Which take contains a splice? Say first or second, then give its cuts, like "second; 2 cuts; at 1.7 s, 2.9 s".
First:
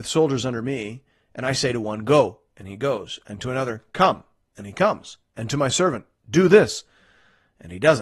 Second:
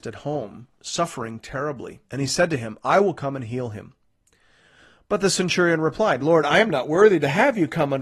second; 1 cut; at 2.0 s